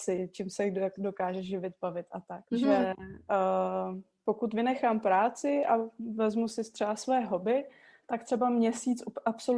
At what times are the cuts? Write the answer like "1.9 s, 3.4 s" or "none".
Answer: 2.5 s